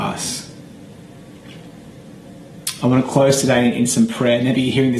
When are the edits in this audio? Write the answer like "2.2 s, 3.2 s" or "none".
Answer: none